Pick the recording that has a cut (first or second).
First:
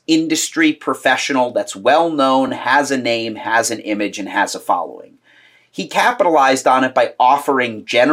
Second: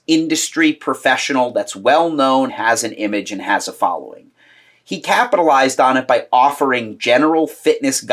second